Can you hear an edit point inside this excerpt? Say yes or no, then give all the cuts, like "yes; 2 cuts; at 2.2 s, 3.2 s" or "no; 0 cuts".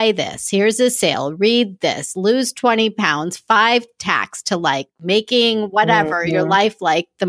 no; 0 cuts